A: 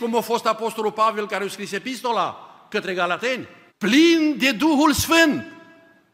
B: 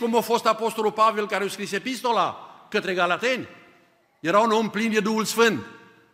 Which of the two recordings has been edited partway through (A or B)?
A